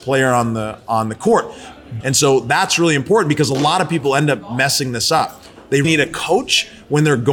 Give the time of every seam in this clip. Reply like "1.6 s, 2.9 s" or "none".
2.0 s, 5.8 s